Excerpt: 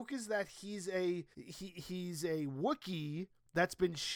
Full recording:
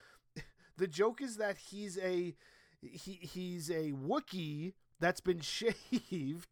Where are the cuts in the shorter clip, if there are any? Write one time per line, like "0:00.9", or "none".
0:01.3